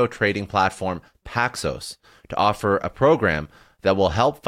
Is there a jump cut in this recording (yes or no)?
no